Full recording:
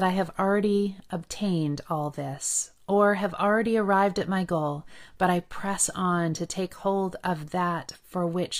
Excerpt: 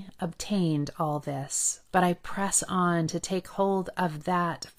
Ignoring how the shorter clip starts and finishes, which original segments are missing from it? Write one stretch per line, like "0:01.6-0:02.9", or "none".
0:02.8-0:05.2